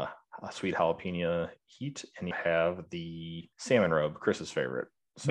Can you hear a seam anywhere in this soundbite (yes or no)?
yes